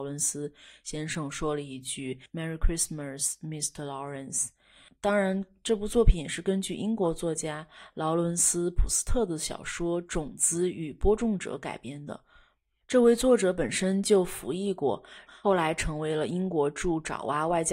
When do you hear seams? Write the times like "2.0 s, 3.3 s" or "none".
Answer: 15.3 s